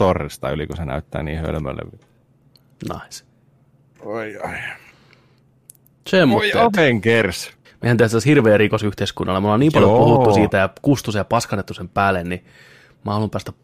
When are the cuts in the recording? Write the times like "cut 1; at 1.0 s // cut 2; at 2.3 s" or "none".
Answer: cut 1; at 7.6 s